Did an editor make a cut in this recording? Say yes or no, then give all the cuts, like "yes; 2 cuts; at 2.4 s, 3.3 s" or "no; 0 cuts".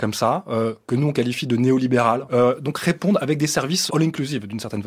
yes; 2 cuts; at 2.3 s, 3.9 s